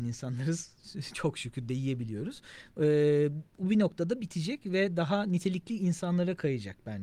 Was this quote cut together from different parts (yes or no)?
no